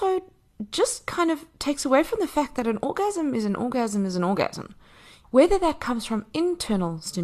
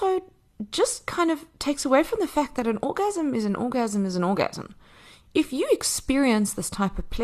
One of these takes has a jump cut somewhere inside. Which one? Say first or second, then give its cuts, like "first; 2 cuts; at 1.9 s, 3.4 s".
first; 1 cut; at 5.2 s